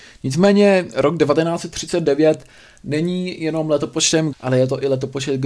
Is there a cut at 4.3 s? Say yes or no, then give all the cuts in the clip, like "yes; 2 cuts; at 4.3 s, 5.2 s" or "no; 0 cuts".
yes; 1 cut; at 4.3 s